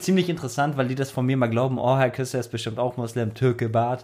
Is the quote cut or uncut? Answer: uncut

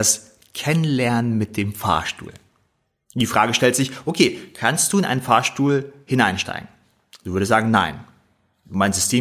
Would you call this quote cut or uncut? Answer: uncut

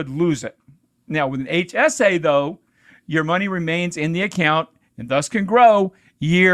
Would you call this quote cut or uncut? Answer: uncut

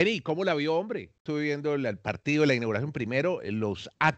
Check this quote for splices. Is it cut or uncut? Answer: cut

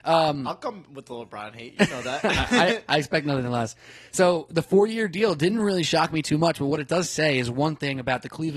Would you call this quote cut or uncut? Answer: uncut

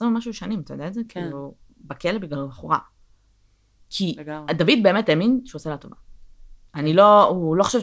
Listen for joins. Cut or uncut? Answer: uncut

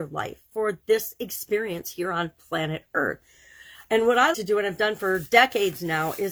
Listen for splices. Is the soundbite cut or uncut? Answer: cut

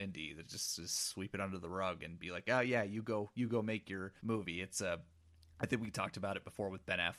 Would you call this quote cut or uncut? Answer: cut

